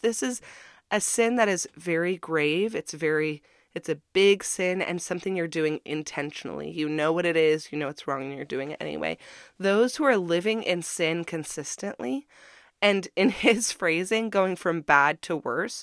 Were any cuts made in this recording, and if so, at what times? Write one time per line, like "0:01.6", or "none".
none